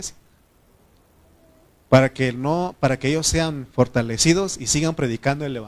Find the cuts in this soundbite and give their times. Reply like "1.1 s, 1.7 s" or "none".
none